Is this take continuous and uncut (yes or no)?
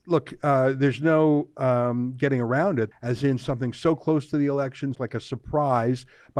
no